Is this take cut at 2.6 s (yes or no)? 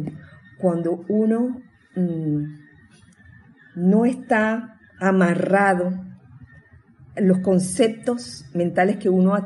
no